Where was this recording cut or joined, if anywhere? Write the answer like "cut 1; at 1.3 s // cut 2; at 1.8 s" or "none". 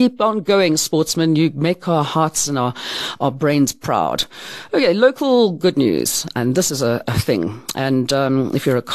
cut 1; at 7.0 s